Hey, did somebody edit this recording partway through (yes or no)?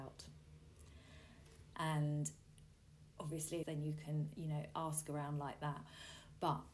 yes